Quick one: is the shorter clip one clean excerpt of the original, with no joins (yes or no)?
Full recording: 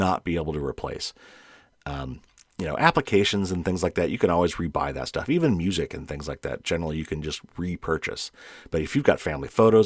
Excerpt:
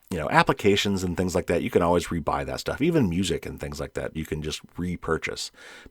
no